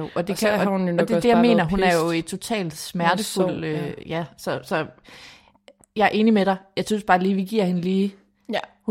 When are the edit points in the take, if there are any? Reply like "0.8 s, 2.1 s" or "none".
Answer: none